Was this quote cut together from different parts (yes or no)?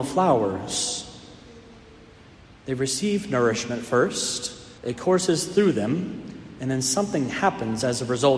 yes